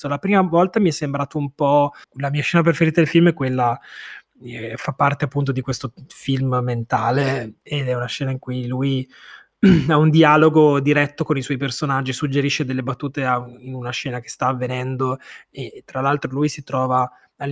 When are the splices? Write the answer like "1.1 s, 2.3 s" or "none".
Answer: 2.0 s